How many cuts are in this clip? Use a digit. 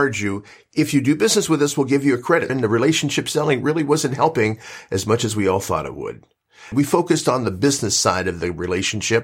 2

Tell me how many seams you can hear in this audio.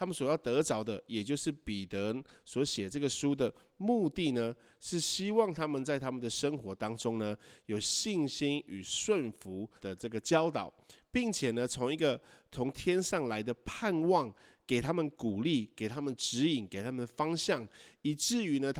1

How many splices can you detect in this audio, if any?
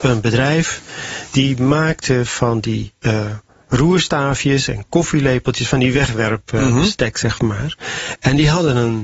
0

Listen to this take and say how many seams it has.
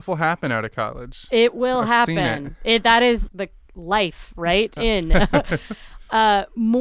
2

